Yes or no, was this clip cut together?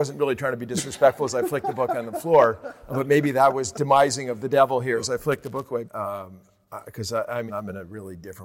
yes